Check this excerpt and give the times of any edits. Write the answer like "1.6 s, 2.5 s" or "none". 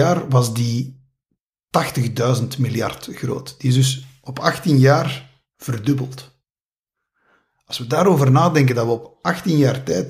none